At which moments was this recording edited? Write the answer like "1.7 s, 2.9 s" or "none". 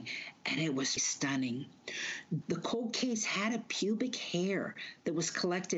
1.0 s, 2.4 s